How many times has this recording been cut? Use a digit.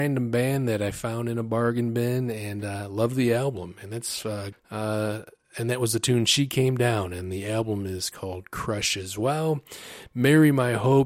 1